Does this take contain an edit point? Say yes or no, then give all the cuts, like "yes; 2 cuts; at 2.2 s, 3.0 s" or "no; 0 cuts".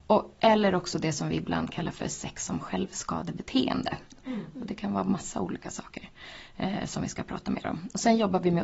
yes; 1 cut; at 4.2 s